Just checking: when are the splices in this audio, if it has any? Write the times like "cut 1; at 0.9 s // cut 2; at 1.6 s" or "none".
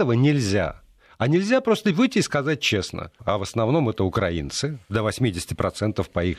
cut 1; at 3.2 s